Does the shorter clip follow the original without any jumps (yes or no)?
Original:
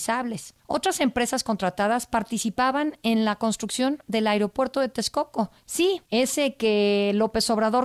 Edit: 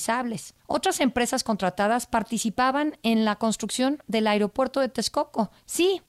yes